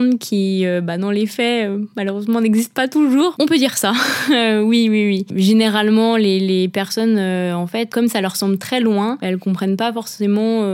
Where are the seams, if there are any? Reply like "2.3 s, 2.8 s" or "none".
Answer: 3.4 s